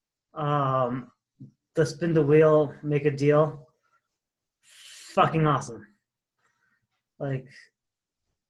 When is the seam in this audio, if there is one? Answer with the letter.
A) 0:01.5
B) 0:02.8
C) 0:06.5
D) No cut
D